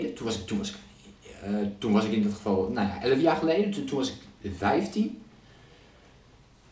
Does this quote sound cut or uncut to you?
uncut